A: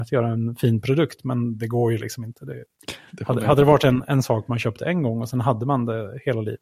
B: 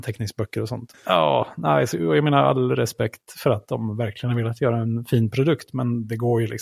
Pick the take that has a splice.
B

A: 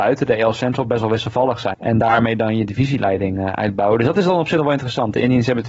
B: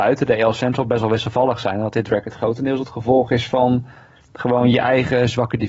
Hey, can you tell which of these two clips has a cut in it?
A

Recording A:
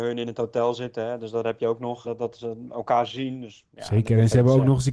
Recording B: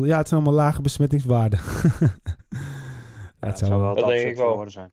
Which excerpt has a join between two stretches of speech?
A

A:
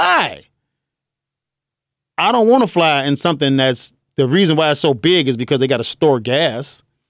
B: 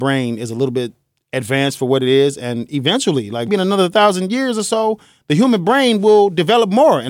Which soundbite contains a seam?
B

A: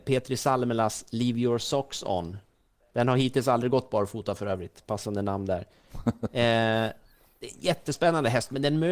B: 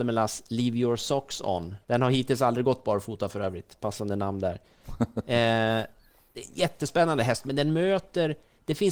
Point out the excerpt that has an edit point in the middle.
B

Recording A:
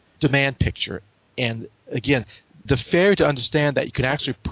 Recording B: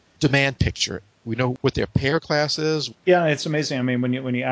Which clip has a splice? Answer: B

